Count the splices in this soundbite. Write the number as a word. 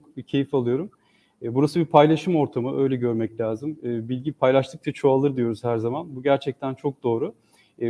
zero